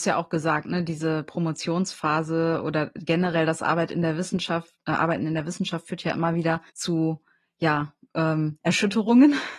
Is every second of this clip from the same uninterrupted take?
no; 1 cut; at 6.7 s

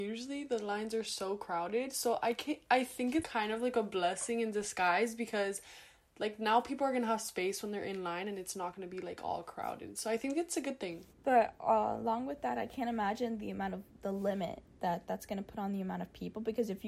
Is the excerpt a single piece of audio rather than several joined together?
no; 2 cuts; at 3.2 s, 11.1 s

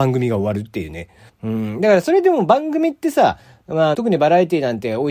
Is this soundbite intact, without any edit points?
no; 2 cuts; at 1.3 s, 3.9 s

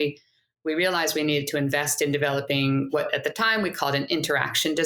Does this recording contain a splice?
no; 0 cuts

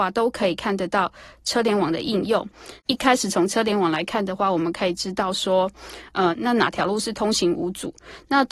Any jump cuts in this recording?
yes; 2 cuts; at 2.8 s, 6.3 s

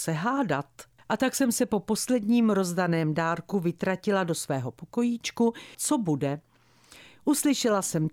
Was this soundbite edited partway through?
yes; 2 cuts; at 1.0 s, 5.7 s

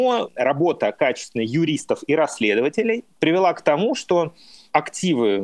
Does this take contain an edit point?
no; 0 cuts

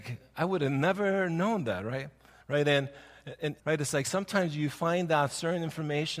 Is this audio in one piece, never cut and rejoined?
no; 2 cuts; at 2.4 s, 3.6 s

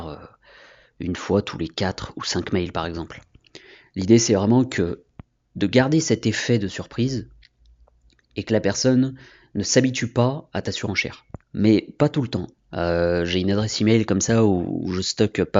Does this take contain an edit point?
yes; 2 cuts; at 11.4 s, 12.5 s

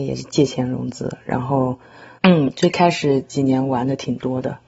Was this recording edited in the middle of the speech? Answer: yes; 1 cut; at 2.2 s

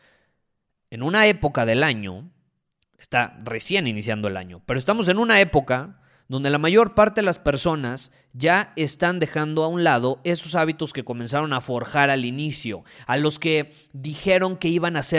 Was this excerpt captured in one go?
no; 1 cut; at 13.0 s

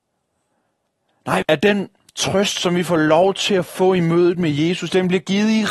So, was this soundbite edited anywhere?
yes; 1 cut; at 1.4 s

